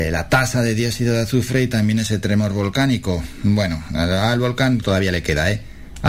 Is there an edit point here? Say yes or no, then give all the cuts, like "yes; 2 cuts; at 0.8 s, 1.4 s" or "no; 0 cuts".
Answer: yes; 1 cut; at 4.8 s